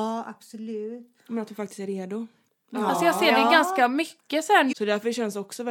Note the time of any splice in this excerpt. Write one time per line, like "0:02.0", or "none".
0:02.5
0:04.7